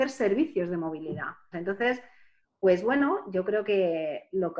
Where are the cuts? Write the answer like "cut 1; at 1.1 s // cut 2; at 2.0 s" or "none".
cut 1; at 1.5 s